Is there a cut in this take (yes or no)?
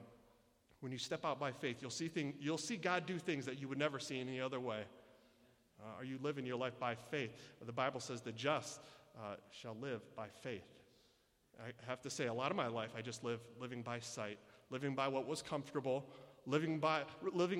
no